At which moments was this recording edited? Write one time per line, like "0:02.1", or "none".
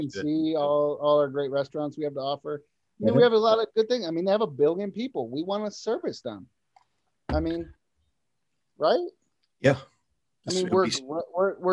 none